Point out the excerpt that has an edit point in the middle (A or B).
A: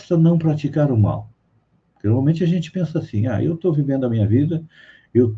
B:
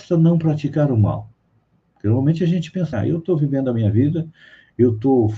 B